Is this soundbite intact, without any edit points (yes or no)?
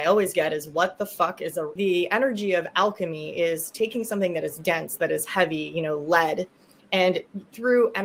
no